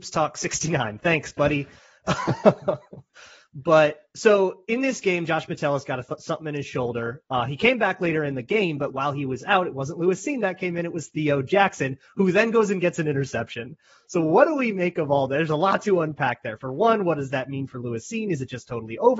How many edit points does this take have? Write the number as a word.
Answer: zero